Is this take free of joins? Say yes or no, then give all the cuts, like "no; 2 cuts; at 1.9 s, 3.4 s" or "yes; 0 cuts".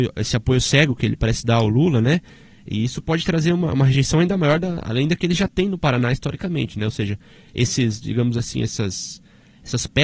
yes; 0 cuts